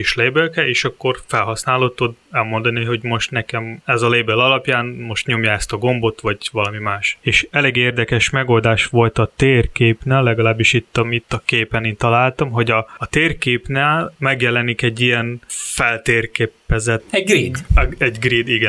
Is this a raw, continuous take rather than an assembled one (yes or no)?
yes